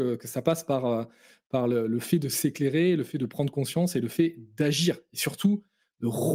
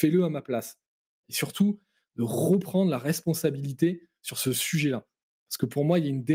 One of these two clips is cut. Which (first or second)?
second